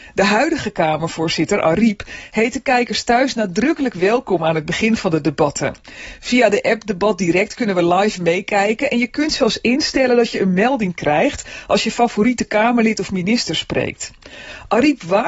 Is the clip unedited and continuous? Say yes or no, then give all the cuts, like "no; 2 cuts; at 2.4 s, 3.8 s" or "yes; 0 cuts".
yes; 0 cuts